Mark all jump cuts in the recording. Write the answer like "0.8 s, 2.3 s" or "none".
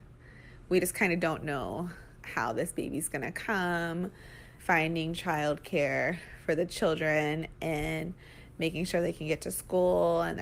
4.6 s